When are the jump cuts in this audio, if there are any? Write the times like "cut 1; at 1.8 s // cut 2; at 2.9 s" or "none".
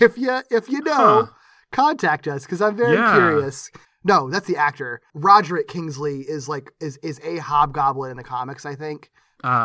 cut 1; at 3.8 s // cut 2; at 5.1 s